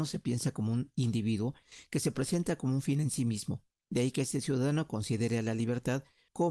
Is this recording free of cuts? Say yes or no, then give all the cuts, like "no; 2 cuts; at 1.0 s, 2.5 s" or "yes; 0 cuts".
yes; 0 cuts